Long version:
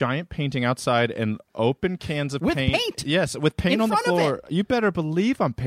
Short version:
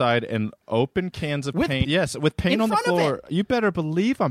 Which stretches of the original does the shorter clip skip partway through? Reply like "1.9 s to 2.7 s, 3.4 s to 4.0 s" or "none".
2.7 s to 3.0 s